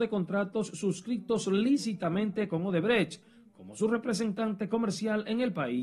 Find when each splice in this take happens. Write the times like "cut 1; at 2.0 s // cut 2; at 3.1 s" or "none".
none